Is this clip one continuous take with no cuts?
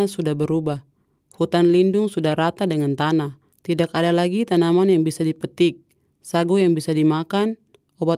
yes; 0 cuts

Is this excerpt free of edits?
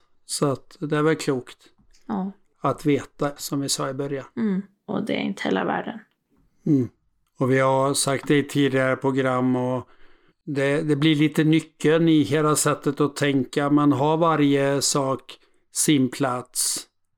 no; 2 cuts; at 3.4 s, 4.8 s

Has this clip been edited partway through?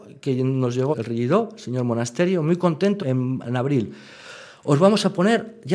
yes; 2 cuts; at 0.9 s, 3.0 s

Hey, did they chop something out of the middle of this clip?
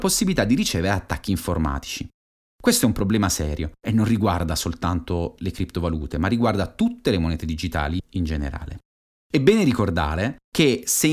no; 0 cuts

